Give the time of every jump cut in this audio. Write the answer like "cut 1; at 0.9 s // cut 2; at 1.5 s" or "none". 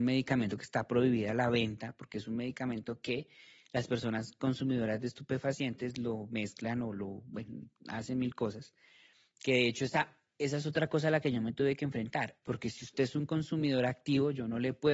cut 1; at 12.4 s